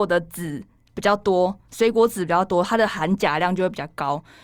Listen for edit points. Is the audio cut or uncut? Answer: uncut